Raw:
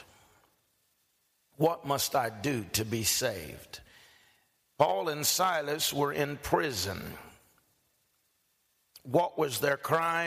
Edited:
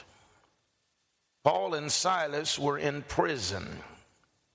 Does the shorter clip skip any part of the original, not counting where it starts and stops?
yes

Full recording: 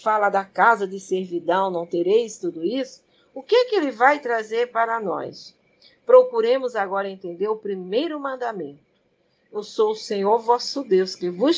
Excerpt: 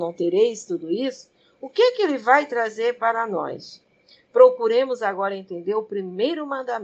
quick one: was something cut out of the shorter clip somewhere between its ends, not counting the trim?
no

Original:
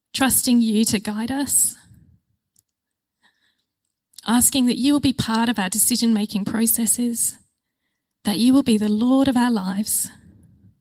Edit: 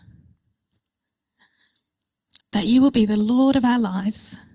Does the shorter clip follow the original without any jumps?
no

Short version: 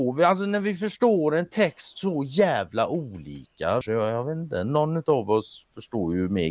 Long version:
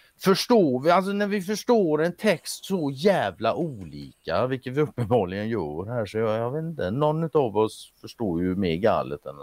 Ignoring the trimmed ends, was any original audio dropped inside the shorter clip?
yes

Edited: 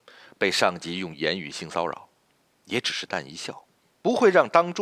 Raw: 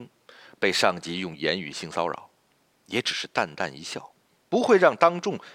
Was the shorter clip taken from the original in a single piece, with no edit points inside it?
no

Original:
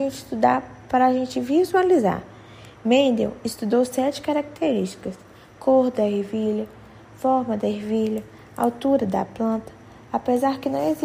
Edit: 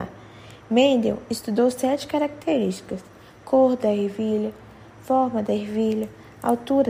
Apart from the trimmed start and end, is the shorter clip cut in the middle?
no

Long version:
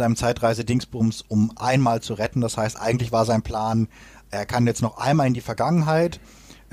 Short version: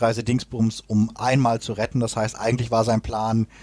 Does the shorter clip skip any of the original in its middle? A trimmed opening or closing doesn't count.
no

